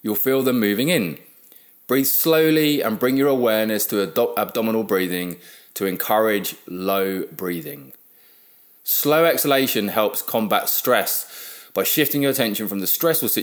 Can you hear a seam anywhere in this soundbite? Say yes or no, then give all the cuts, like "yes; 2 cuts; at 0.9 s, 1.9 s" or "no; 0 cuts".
no; 0 cuts